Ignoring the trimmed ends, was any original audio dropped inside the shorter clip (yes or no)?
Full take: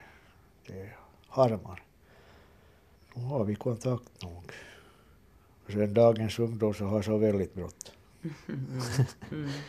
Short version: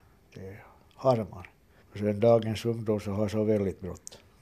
yes